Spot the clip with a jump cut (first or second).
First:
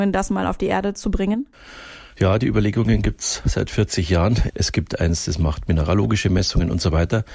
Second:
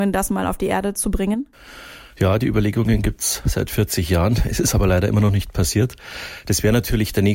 first